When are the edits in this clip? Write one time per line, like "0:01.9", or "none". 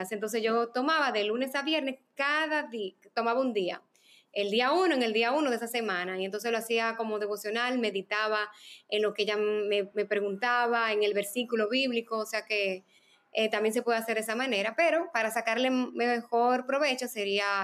none